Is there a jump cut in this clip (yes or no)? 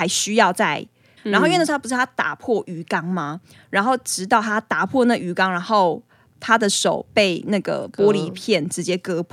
yes